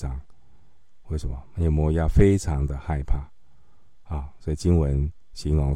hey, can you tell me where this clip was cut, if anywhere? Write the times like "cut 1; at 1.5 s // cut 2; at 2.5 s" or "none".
none

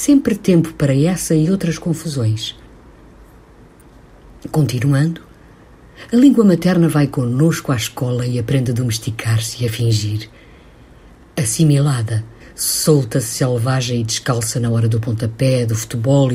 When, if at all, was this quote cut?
cut 1; at 12.4 s

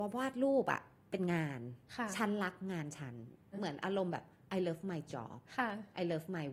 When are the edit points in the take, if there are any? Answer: cut 1; at 3.5 s

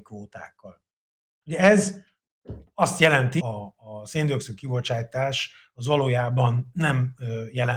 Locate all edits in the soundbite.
cut 1; at 3.4 s

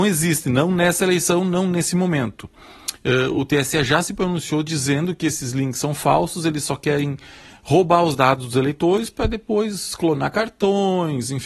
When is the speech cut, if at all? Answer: none

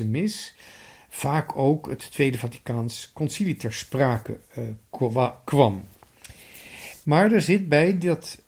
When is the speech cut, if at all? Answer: cut 1; at 7.0 s

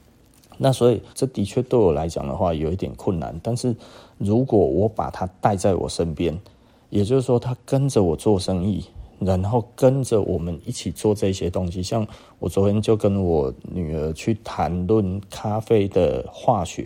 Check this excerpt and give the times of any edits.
cut 1; at 1.1 s

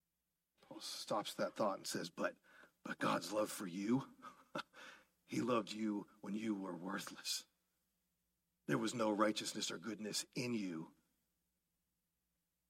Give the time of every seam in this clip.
none

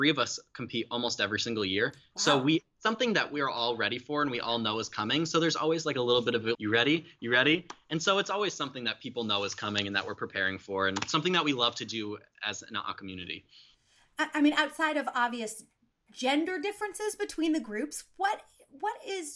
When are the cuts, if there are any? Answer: cut 1; at 6.5 s

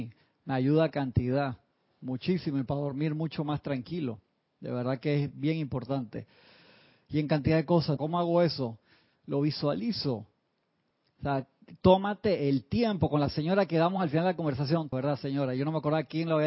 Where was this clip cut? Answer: cut 1; at 8.0 s // cut 2; at 14.9 s

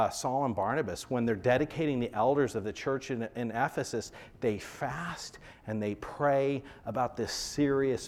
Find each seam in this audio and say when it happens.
none

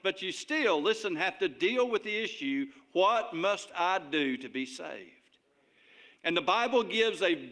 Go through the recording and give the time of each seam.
cut 1; at 6.2 s

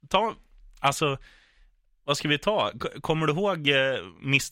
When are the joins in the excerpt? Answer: none

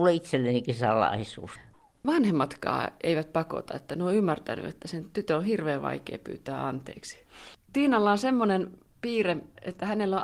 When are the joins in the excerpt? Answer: cut 1; at 7.5 s

